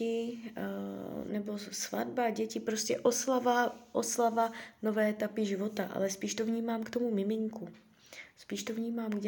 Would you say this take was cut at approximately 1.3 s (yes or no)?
yes